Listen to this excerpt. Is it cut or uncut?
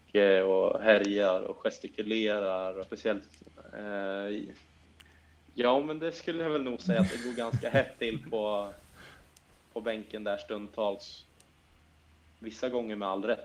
cut